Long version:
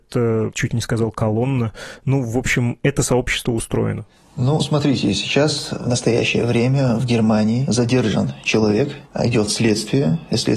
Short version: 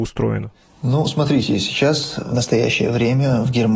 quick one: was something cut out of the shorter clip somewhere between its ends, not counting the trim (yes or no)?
no